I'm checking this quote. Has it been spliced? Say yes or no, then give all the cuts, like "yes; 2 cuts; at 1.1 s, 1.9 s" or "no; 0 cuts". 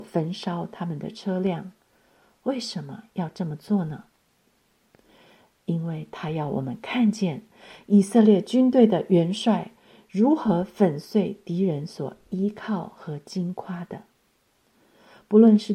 no; 0 cuts